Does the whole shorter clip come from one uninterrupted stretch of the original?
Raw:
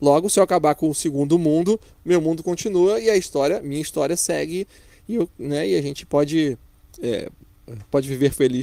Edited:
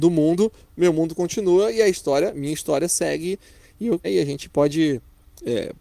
no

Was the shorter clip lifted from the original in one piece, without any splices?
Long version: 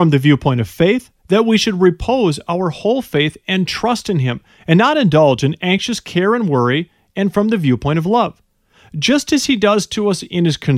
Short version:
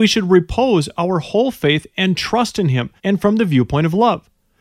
no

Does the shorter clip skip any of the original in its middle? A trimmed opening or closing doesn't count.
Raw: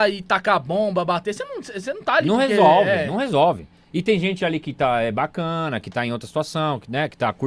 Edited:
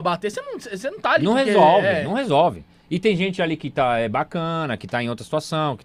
no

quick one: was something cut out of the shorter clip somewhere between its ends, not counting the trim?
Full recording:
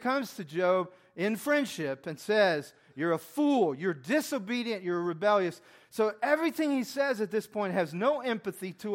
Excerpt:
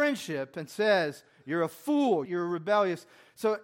yes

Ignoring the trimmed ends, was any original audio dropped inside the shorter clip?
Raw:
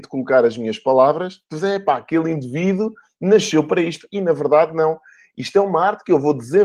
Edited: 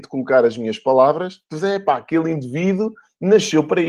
no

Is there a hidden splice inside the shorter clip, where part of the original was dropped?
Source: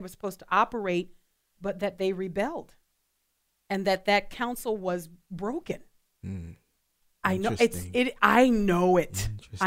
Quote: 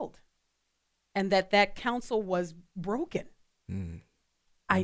no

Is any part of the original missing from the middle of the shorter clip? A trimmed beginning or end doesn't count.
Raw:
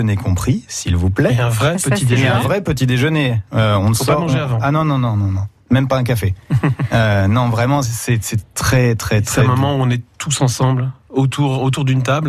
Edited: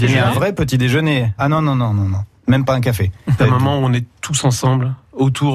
yes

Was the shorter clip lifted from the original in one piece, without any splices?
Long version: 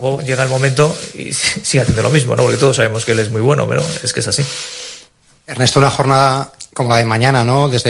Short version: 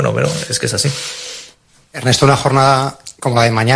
yes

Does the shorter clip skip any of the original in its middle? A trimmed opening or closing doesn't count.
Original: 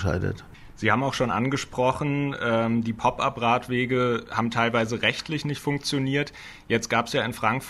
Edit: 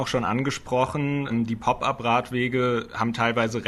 yes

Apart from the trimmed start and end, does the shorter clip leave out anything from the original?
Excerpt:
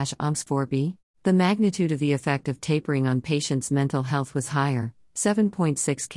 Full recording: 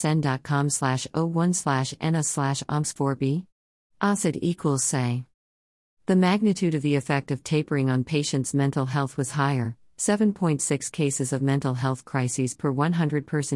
yes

